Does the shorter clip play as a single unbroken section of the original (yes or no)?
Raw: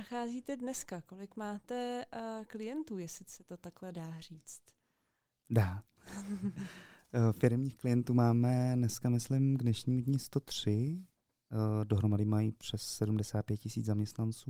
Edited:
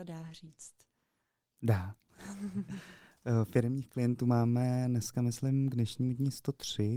yes